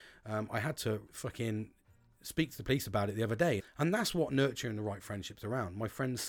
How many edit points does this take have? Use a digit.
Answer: 2